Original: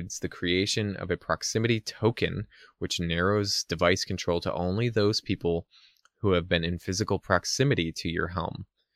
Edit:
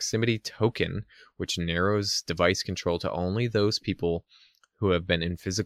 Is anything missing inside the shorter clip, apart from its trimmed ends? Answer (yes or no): no